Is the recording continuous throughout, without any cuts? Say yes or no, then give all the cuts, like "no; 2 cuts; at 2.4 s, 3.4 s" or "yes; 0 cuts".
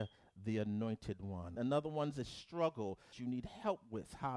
no; 2 cuts; at 1.6 s, 3.1 s